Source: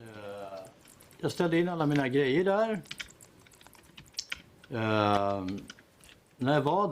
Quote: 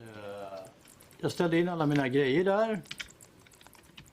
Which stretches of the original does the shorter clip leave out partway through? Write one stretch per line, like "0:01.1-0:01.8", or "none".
none